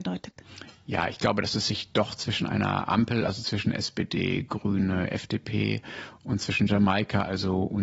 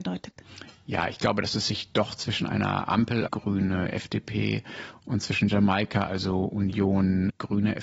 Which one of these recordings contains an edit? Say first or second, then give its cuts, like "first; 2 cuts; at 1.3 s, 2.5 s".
second; 1 cut; at 3.3 s